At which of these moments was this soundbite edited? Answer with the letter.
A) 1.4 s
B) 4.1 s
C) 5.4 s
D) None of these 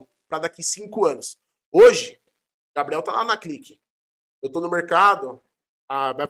D